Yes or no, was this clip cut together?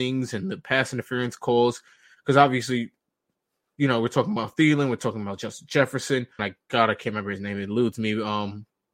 yes